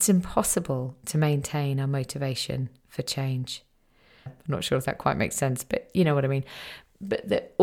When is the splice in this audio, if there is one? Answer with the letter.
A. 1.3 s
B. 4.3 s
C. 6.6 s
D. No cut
B